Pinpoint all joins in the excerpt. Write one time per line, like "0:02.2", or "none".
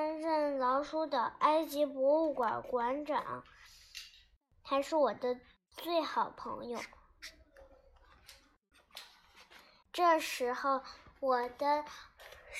0:09.8